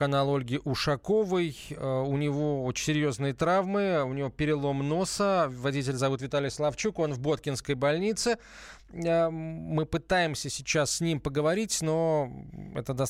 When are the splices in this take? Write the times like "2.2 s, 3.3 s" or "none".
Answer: none